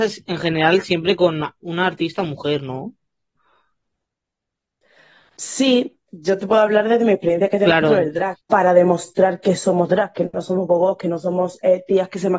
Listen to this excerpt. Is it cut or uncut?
cut